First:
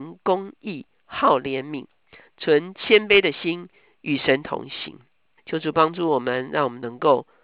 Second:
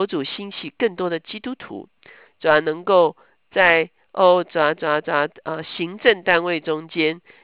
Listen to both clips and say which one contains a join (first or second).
first